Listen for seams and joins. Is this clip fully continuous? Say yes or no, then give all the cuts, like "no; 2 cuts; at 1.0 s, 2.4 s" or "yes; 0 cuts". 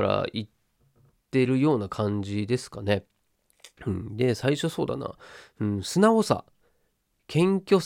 yes; 0 cuts